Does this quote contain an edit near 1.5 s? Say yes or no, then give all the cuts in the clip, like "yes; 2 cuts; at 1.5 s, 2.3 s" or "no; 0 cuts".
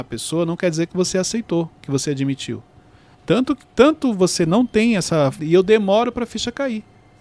no; 2 cuts; at 3.1 s, 5.4 s